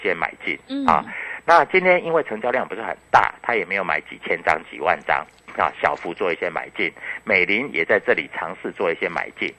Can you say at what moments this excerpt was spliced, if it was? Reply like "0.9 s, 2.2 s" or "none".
none